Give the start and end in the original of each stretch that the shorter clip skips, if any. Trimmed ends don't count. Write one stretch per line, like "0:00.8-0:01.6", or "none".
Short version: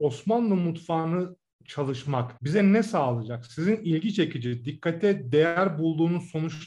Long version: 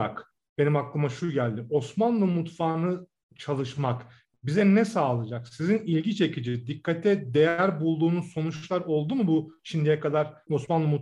0:04.1-0:04.4